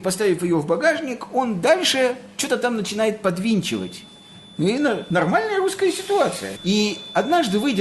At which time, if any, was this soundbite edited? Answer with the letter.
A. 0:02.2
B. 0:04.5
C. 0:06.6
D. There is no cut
C